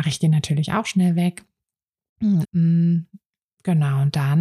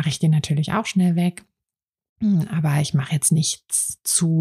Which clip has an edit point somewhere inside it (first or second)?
first